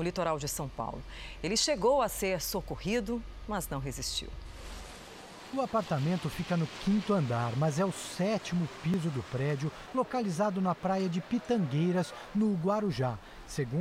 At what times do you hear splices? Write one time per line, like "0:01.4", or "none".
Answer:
none